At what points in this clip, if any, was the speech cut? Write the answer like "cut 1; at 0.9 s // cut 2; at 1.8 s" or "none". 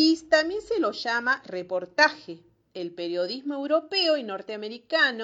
none